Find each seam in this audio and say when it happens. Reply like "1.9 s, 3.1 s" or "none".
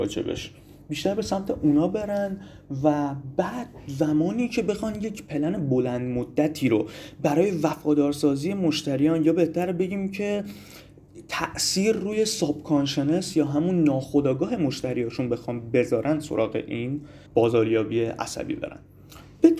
17.3 s